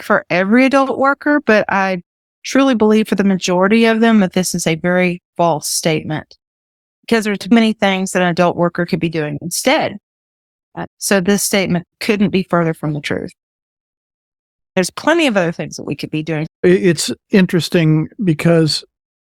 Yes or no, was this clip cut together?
yes